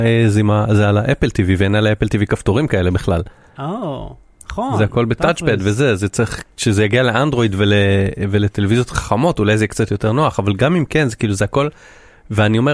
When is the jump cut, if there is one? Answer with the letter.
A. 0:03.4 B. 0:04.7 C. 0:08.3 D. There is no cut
D